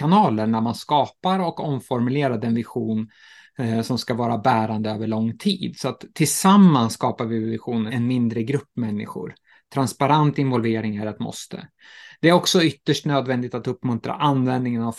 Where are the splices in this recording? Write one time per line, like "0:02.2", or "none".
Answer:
0:07.9